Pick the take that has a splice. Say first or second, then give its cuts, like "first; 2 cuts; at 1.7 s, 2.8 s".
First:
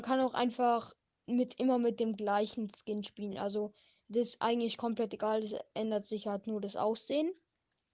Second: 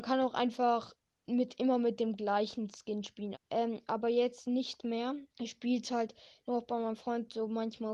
second; 2 cuts; at 3.3 s, 5.3 s